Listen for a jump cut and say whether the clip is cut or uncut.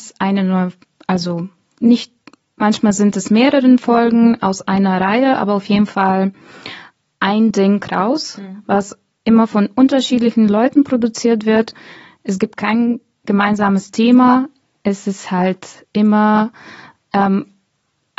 uncut